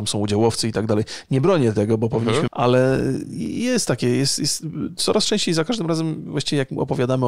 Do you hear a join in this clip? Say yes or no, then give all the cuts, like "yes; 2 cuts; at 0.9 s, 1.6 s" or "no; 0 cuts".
yes; 1 cut; at 2.5 s